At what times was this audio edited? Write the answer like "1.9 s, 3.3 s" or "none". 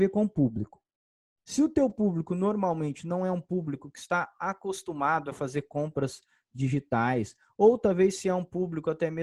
none